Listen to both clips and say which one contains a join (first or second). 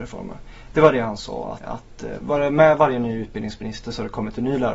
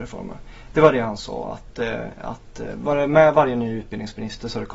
first